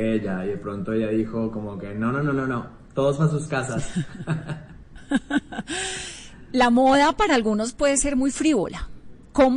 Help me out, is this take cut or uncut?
uncut